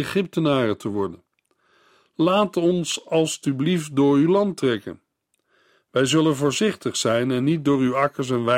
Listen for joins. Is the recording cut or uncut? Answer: uncut